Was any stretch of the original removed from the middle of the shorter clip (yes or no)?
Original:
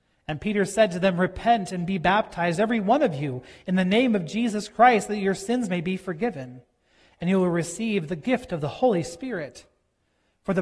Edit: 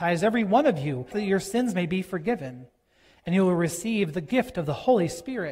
yes